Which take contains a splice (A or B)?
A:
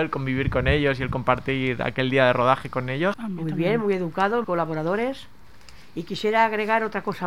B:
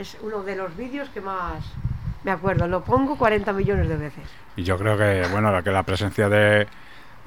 A